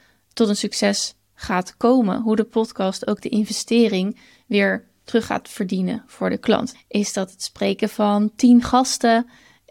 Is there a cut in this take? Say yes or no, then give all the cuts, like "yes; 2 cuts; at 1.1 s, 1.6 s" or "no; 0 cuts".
yes; 1 cut; at 6.7 s